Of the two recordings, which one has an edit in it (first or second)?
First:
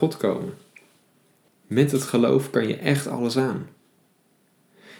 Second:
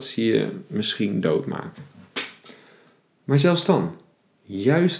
first